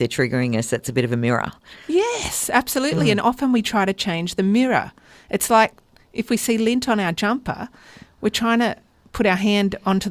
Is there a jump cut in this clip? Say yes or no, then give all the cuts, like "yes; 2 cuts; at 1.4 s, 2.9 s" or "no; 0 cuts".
no; 0 cuts